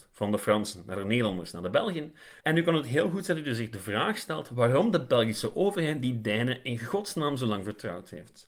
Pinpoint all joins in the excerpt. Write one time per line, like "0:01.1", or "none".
0:02.4